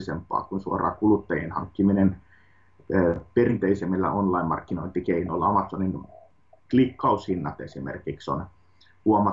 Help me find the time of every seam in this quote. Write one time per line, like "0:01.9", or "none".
none

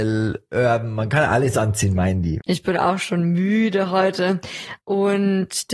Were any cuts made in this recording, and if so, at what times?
0:02.4
0:04.8

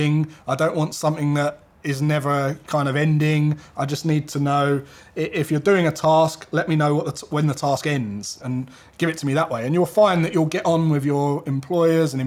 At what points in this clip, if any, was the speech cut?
0:08.4

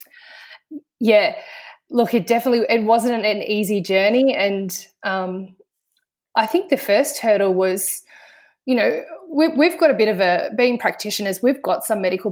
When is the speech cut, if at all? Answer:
none

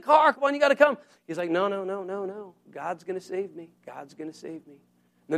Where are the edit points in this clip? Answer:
0:03.8

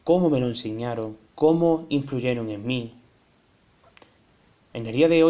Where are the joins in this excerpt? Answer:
0:01.3

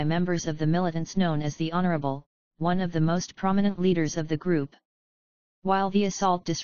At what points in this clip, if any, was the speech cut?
0:02.5

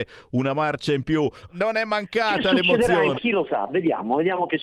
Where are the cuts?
0:01.5
0:03.1

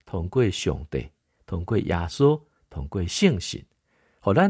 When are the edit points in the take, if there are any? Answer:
none

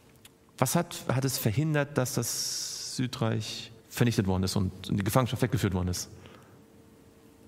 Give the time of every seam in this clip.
0:03.8

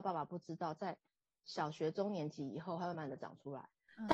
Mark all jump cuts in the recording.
0:02.9

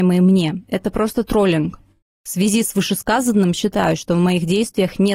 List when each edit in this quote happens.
0:02.0

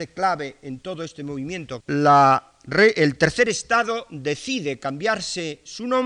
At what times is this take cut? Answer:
0:01.8

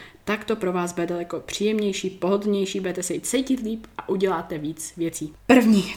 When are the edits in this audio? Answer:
none

